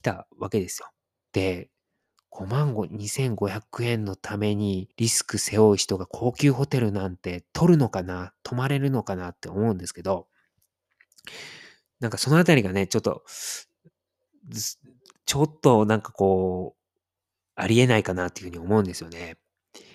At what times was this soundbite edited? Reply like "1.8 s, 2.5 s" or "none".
1.2 s, 4.9 s